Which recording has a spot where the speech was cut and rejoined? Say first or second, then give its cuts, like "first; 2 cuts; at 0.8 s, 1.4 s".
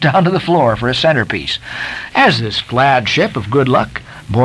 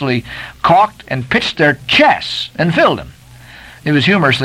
first; 1 cut; at 2.1 s